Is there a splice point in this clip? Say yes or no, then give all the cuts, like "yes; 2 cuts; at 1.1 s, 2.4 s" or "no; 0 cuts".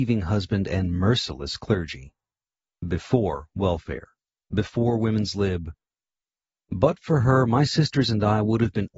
no; 0 cuts